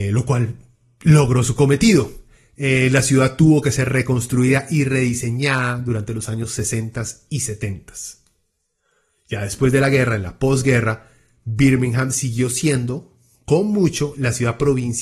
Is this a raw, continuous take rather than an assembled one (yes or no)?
yes